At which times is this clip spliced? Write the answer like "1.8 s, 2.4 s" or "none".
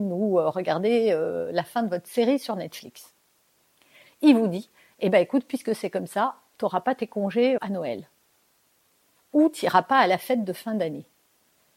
4.0 s, 7.6 s